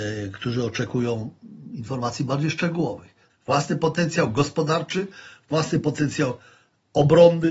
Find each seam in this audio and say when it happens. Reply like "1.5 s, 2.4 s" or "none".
3.3 s

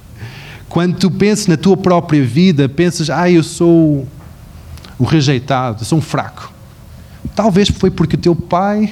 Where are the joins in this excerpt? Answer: none

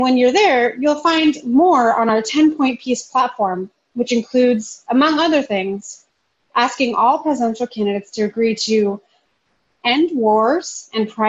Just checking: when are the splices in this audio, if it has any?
none

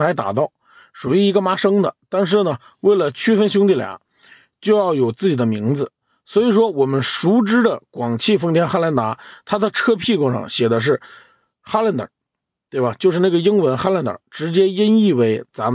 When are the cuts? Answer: none

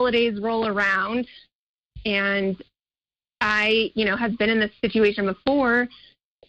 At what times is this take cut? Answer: none

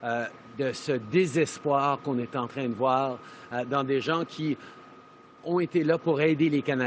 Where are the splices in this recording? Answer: 5.4 s

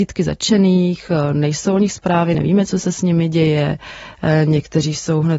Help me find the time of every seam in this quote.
none

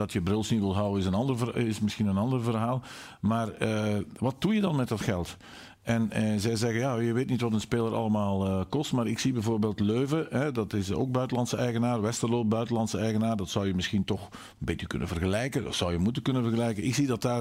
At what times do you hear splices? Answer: none

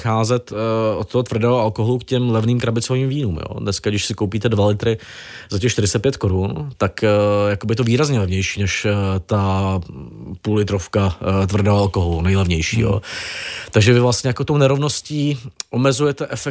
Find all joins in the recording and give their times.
none

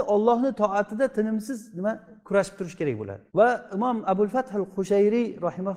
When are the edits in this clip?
2.2 s, 3.3 s

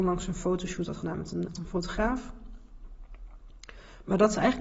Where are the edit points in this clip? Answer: 1.5 s

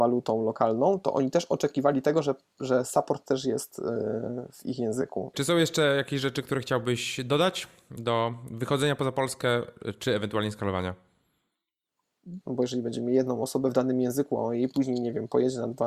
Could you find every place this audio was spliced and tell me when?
5.3 s, 12.4 s

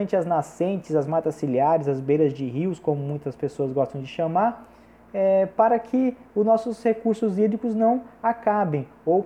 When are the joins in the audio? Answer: none

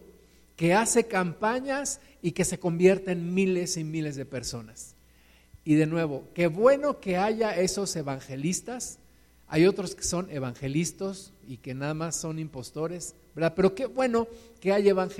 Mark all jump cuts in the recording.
none

